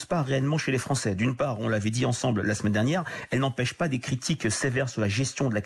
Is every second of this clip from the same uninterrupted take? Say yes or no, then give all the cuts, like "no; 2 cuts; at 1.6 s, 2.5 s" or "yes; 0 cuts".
yes; 0 cuts